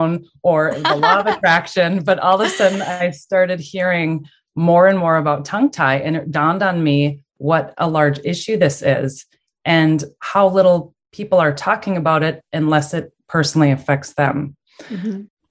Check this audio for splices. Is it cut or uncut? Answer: uncut